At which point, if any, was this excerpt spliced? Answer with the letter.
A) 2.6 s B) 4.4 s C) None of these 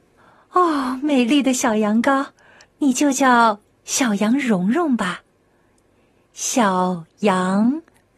A